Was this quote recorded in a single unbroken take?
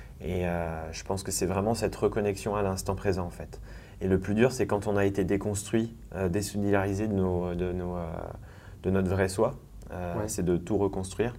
yes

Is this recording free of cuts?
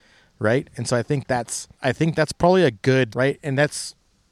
no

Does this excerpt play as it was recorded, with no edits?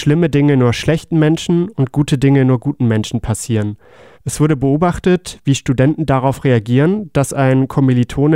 no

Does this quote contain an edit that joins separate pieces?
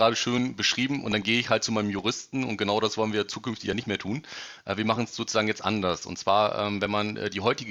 no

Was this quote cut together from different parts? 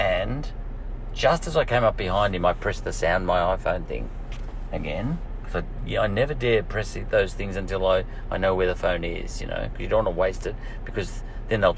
no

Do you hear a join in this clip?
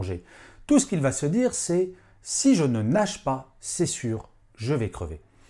no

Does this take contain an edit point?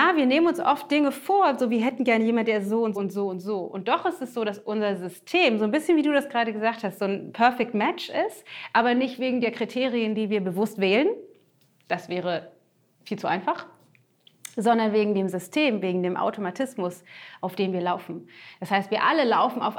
yes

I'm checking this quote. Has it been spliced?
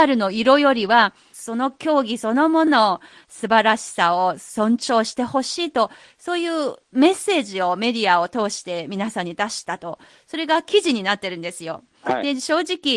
yes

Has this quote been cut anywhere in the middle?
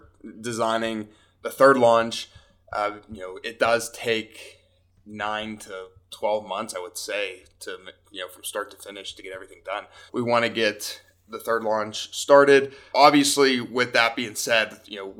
yes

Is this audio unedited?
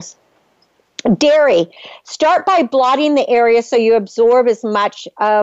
yes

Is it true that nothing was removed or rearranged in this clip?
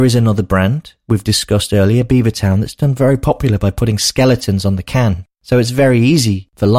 yes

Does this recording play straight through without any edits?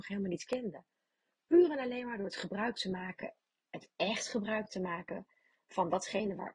yes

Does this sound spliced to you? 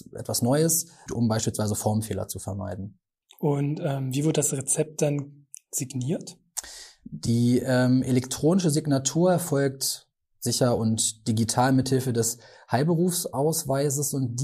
yes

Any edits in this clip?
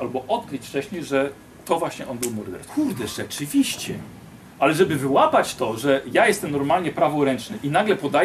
yes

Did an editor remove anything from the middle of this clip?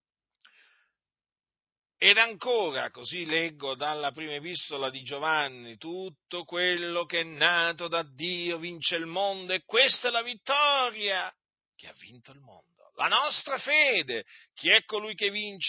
no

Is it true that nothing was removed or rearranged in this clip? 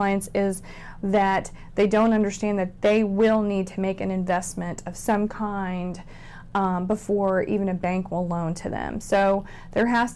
yes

